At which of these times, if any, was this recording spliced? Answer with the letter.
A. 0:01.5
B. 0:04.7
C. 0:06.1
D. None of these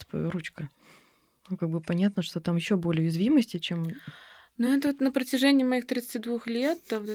D